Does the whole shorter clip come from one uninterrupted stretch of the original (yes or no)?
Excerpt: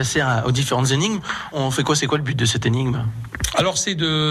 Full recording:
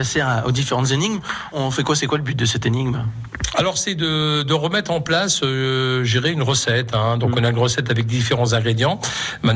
yes